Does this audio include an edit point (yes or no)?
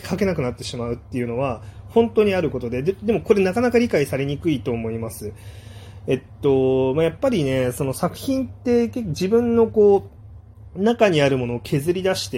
no